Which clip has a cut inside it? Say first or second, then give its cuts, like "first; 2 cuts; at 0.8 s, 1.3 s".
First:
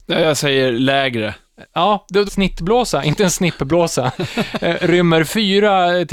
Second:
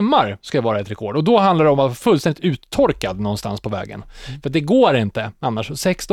first; 1 cut; at 2.3 s